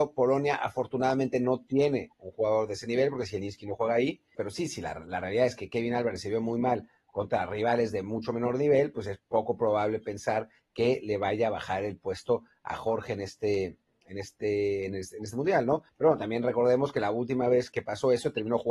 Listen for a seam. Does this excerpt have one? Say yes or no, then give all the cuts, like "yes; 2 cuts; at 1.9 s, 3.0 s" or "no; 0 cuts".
yes; 3 cuts; at 4.3 s, 15.9 s, 17.7 s